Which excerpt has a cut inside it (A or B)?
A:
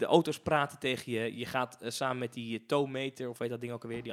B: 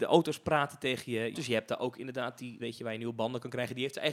B